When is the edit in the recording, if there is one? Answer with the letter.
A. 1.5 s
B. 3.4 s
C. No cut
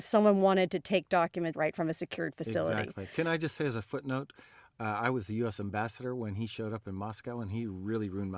A